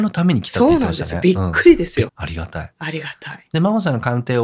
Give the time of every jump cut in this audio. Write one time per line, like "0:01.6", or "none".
0:02.1